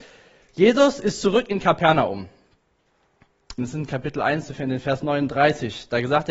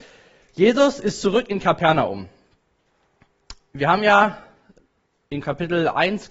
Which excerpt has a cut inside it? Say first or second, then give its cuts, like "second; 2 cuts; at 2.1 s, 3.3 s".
first; 1 cut; at 3.6 s